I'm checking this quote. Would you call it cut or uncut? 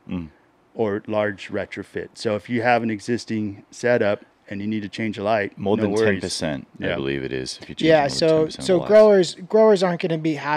uncut